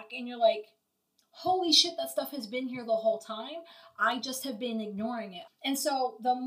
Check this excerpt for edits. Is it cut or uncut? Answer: cut